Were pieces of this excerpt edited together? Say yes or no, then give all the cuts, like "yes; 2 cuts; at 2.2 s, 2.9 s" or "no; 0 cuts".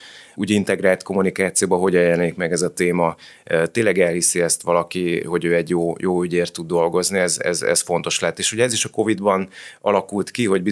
yes; 1 cut; at 5.2 s